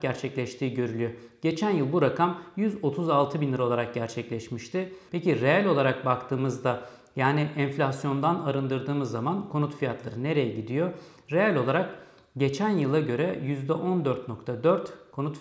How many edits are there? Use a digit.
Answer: 1